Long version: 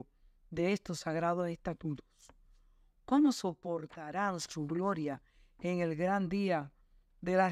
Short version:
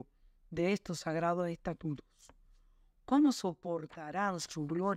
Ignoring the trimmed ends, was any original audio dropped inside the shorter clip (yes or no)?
no